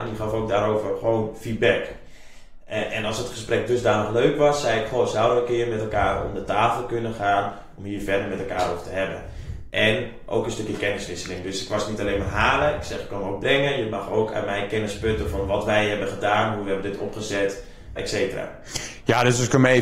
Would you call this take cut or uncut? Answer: cut